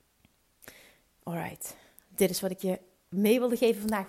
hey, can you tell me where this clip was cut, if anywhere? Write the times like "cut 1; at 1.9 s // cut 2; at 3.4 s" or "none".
none